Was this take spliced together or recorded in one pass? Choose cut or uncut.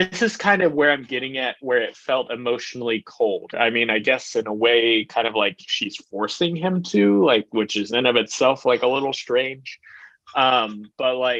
cut